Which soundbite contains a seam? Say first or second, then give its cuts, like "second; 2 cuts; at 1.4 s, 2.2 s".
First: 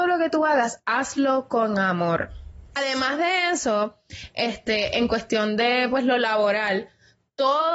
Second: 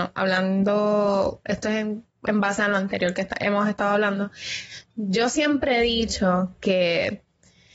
first; 1 cut; at 2.8 s